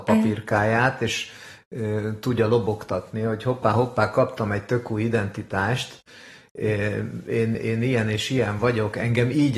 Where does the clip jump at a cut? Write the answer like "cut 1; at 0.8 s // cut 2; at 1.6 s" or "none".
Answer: cut 1; at 7.5 s